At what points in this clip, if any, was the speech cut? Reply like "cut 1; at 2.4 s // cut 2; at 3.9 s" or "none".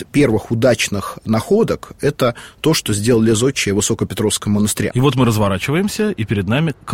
cut 1; at 4.9 s